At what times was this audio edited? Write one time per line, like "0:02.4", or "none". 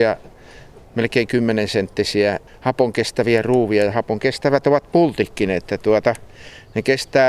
0:02.5